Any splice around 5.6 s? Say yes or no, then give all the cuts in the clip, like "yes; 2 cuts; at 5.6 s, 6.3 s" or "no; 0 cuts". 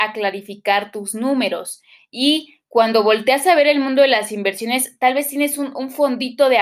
no; 1 cut; at 2.0 s